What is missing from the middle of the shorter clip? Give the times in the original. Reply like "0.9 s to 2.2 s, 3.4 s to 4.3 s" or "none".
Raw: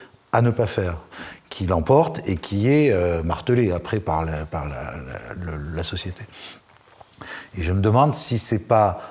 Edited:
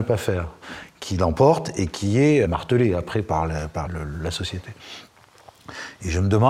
2.9 s to 3.2 s, 4.6 s to 5.4 s